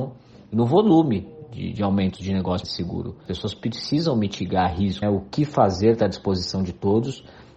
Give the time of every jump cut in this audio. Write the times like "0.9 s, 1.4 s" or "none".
2.6 s, 5.0 s